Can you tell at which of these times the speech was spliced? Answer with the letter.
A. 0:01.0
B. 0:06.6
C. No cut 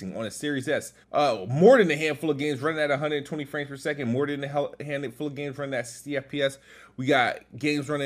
A